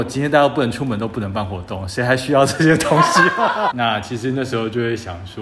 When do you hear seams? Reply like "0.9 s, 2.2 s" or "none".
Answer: 3.7 s